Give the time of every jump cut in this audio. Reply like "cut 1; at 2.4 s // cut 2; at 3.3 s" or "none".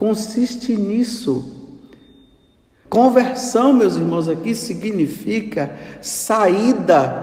cut 1; at 2.9 s